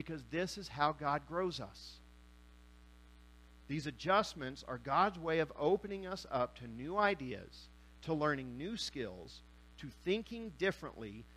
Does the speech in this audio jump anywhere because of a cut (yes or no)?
no